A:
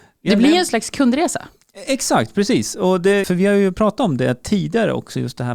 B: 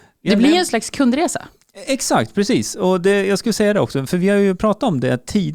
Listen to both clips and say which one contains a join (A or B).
A